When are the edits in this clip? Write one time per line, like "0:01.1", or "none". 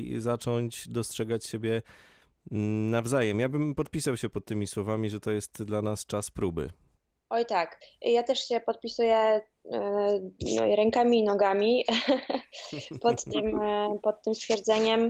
none